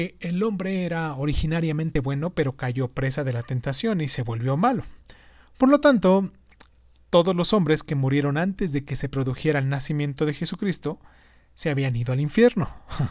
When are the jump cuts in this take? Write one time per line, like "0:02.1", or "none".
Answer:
none